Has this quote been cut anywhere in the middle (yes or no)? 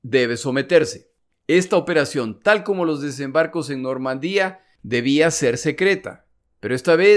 yes